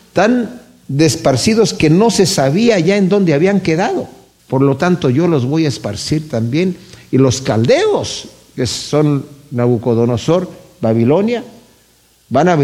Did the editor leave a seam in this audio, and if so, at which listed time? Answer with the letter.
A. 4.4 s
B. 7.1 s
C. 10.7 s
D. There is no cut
A